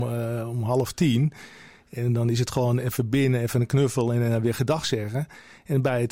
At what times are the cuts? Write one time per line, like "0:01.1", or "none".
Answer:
none